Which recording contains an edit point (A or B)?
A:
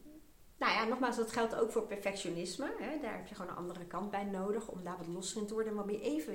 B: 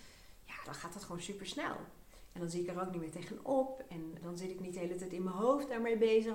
B